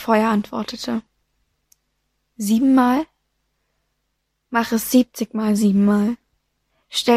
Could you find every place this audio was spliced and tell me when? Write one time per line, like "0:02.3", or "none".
none